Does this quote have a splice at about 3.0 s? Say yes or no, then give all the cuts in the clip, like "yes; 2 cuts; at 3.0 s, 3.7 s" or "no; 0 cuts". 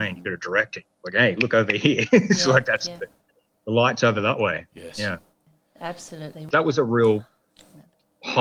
no; 1 cut; at 6.5 s